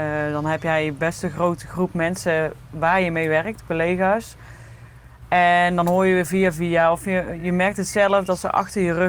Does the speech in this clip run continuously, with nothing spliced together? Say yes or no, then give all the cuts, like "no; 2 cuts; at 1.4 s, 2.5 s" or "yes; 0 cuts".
yes; 0 cuts